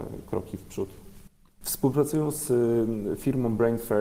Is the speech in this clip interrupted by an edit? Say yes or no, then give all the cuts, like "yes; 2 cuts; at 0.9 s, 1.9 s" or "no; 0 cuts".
yes; 1 cut; at 1.5 s